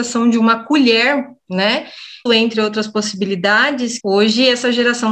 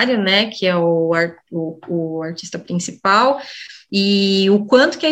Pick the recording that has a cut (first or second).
first